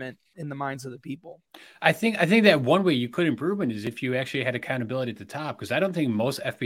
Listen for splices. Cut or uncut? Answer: uncut